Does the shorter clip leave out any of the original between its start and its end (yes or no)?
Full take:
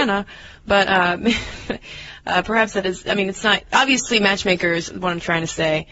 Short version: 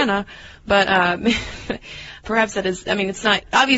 yes